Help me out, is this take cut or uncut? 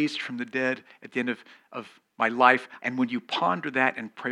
cut